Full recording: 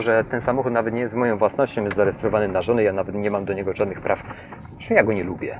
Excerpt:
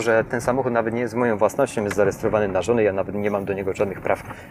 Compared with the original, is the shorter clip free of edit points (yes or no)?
yes